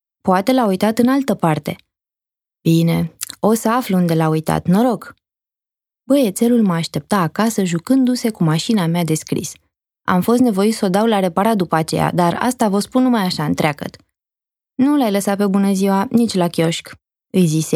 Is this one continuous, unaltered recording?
yes; 0 cuts

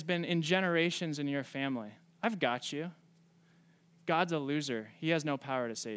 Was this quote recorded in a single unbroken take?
yes; 0 cuts

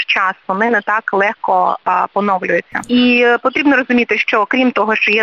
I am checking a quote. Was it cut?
yes; 1 cut; at 2.9 s

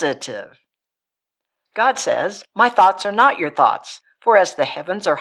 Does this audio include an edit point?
yes; 1 cut; at 1.6 s

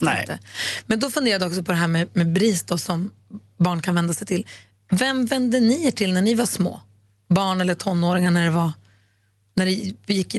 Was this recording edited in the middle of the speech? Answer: no; 0 cuts

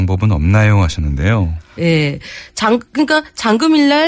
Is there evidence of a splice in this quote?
yes; 1 cut; at 1.8 s

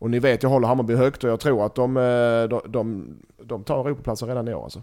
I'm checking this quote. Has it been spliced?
yes; 1 cut; at 3.3 s

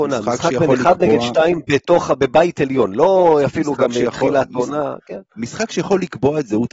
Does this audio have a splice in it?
no; 0 cuts

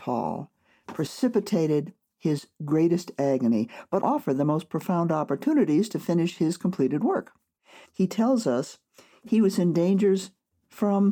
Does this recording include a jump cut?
yes; 2 cuts; at 4.0 s, 7.8 s

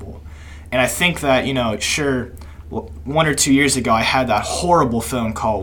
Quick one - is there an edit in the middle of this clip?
no; 0 cuts

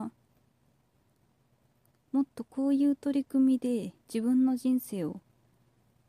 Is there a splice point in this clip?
yes; 1 cut; at 4.0 s

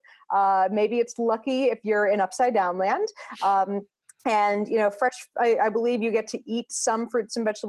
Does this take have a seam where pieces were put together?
no; 0 cuts

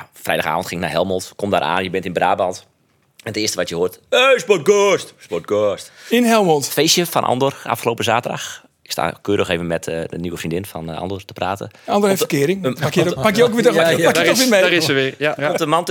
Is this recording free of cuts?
yes; 0 cuts

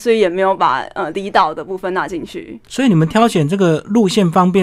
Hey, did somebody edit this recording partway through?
no; 0 cuts

